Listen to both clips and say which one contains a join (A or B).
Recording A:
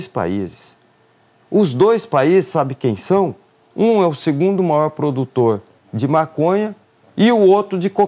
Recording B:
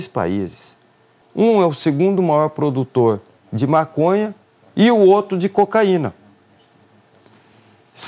B